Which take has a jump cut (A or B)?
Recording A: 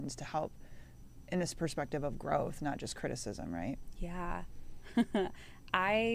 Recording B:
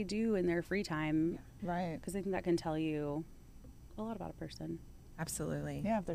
B